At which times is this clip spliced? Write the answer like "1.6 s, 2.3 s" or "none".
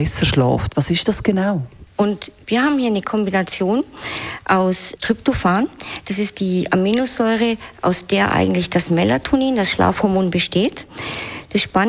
1.9 s